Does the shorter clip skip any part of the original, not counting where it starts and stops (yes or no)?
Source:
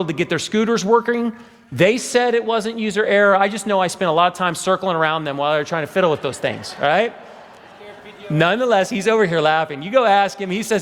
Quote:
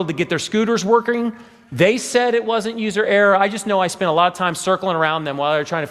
no